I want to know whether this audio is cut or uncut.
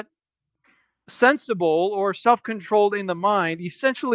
uncut